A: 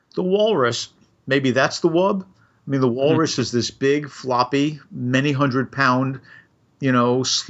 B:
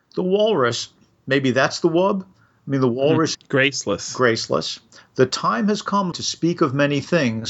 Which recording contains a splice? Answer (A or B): B